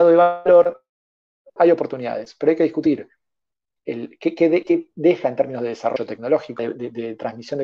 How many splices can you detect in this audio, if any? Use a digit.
2